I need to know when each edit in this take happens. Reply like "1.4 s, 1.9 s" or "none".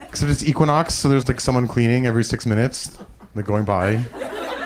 1.2 s